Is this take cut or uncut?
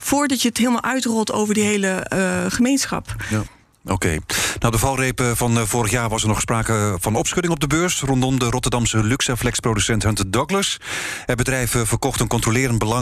uncut